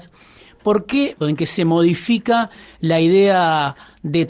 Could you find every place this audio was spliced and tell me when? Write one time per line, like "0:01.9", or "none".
0:01.2